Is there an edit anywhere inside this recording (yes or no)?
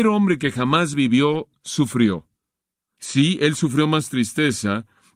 no